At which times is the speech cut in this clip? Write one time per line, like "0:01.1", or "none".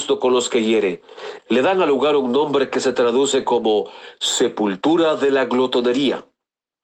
0:01.4

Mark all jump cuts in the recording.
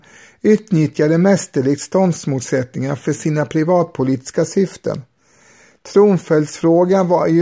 none

